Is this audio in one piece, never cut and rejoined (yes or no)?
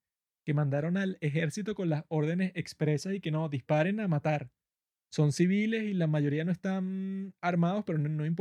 yes